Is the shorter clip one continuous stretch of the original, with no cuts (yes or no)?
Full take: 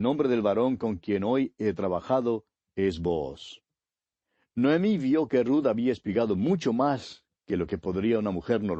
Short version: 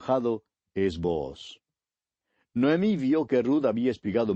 yes